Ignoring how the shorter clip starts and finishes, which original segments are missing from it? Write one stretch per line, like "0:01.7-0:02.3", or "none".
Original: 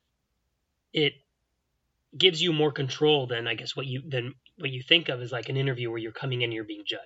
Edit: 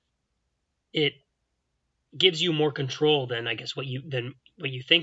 none